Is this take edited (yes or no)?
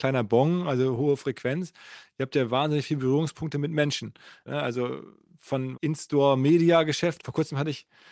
yes